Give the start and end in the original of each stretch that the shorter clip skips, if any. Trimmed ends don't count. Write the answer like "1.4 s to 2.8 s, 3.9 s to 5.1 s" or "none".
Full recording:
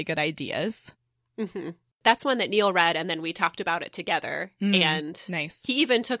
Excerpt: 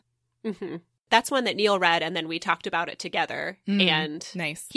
none